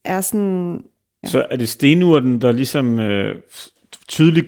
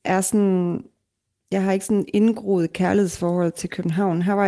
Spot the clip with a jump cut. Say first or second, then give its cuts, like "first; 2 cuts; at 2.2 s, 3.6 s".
first; 1 cut; at 1.2 s